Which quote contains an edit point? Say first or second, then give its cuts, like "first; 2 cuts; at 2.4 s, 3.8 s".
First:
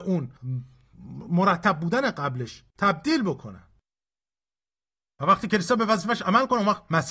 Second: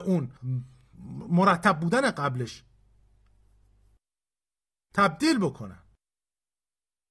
first; 1 cut; at 2.7 s